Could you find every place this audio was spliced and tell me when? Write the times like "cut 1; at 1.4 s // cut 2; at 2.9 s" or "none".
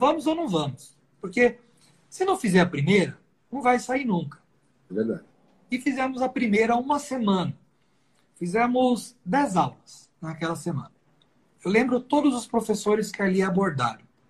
none